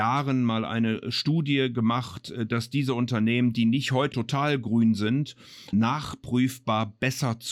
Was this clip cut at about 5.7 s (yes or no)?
yes